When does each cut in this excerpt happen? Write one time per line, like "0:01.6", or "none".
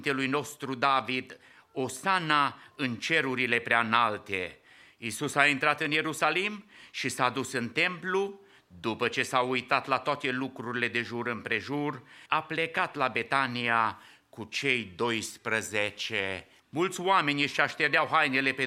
0:12.3
0:16.6